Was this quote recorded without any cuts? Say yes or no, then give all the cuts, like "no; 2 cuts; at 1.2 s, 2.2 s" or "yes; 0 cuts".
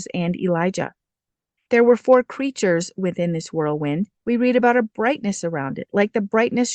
no; 2 cuts; at 1.6 s, 4.2 s